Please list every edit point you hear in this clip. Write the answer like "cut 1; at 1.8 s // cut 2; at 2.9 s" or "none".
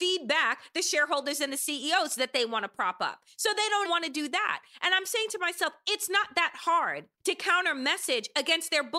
cut 1; at 3.8 s // cut 2; at 7.2 s